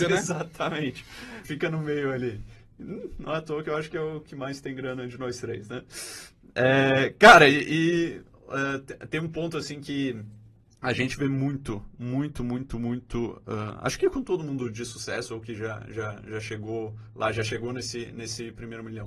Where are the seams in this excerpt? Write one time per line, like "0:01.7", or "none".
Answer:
0:01.4